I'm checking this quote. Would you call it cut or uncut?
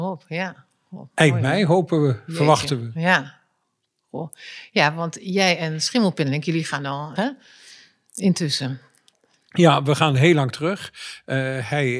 cut